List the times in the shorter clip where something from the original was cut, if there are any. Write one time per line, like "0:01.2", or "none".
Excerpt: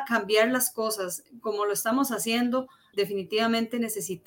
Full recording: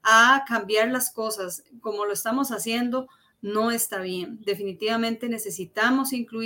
0:02.9